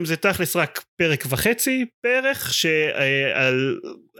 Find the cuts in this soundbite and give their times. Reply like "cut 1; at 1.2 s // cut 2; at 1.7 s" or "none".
none